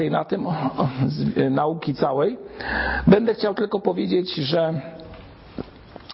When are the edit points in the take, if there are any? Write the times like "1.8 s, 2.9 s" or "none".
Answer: none

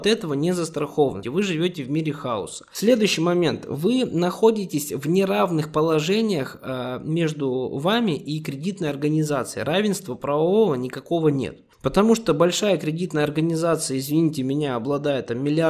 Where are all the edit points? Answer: 1.2 s

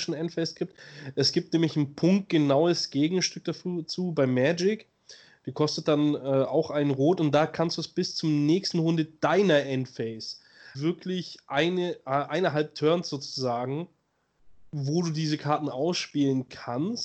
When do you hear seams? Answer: 10.7 s

